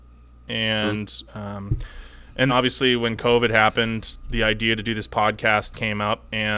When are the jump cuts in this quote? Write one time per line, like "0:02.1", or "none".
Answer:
0:01.3
0:02.5

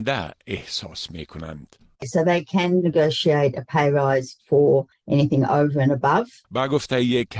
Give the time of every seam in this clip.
0:01.9
0:06.4

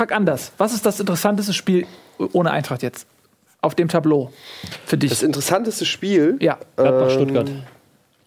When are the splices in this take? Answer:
none

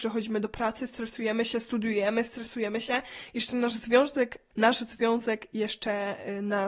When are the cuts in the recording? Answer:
0:04.5

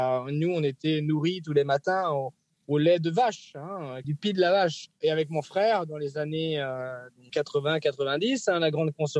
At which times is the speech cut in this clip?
0:04.0
0:07.3

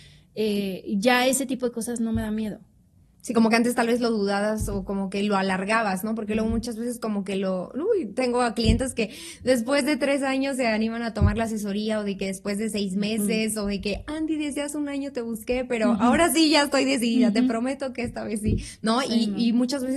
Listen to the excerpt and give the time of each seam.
none

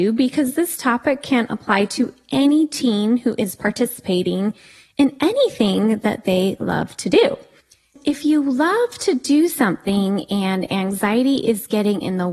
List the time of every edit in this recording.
none

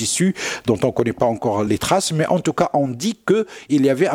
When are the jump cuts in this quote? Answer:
0:01.7

